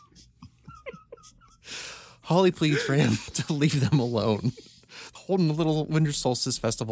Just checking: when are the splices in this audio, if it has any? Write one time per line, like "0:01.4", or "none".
0:05.2